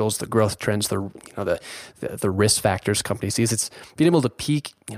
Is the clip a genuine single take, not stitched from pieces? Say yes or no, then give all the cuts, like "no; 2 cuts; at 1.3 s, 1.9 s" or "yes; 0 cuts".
yes; 0 cuts